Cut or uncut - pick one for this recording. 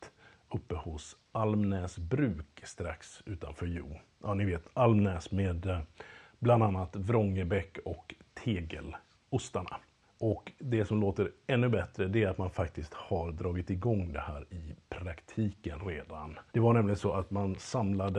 cut